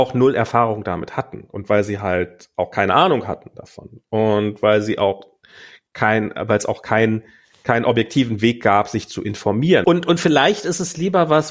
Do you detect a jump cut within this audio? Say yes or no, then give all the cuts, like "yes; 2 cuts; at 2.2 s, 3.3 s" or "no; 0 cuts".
yes; 1 cut; at 9.8 s